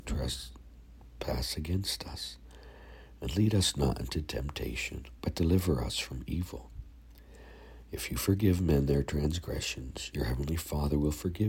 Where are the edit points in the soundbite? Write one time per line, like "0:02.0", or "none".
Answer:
0:05.2